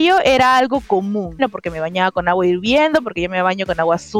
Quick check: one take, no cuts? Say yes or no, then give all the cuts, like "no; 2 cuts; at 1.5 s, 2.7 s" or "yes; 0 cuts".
no; 1 cut; at 1.4 s